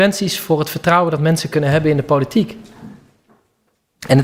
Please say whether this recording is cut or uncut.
uncut